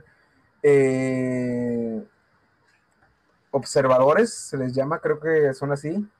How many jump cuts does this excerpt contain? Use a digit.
0